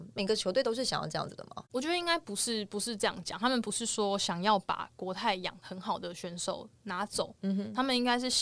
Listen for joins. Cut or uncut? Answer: uncut